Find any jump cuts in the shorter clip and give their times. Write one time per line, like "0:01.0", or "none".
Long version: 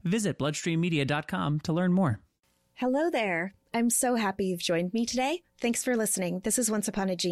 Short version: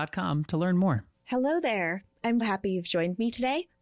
0:01.1
0:02.4

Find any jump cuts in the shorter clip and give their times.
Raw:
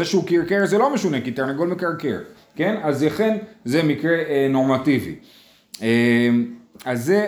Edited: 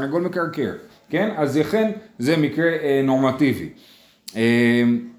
none

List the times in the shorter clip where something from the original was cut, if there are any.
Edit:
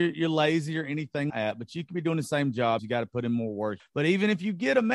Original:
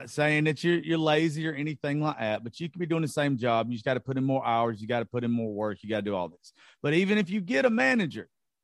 0:01.3
0:02.8
0:03.8

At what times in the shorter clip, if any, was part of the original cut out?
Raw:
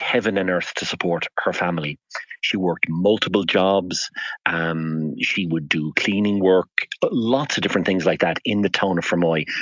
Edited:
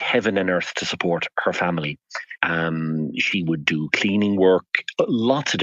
0:02.4

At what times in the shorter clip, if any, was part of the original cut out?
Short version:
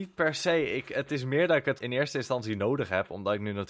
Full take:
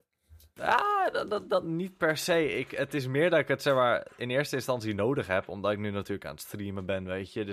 0:01.8

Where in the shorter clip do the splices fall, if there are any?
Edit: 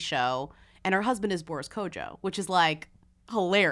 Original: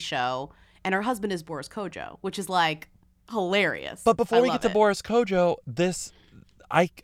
none

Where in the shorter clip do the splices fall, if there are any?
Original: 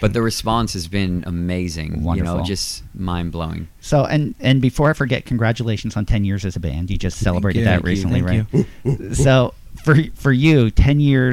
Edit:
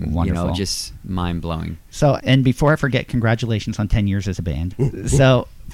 0:02.2
0:04.7

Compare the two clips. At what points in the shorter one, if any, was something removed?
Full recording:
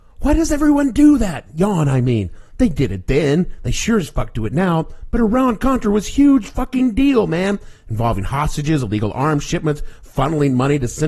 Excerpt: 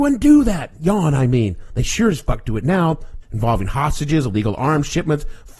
0:01.7
0:03.2

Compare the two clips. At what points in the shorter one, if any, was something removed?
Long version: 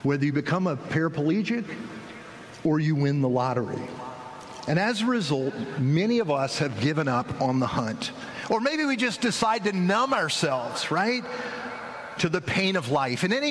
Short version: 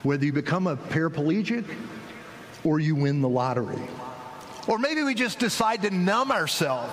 0:04.7

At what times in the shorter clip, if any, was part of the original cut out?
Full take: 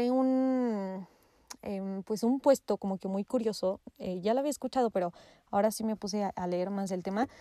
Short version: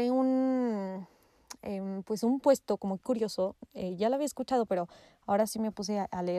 0:03.0

